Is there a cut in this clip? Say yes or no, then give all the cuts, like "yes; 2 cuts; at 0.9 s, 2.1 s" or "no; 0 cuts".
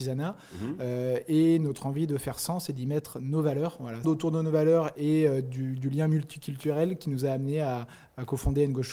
yes; 1 cut; at 4.0 s